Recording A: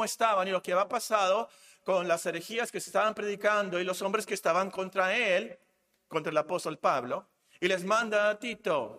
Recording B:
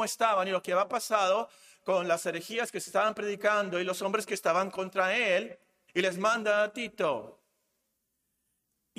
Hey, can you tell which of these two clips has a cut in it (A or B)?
B